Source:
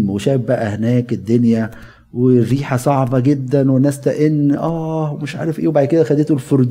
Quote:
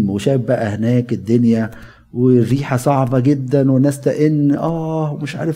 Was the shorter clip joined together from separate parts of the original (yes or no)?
no